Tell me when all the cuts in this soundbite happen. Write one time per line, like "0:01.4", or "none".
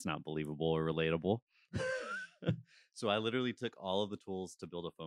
none